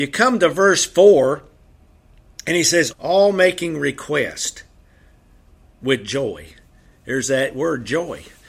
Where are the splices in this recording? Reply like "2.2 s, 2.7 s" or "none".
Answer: 2.9 s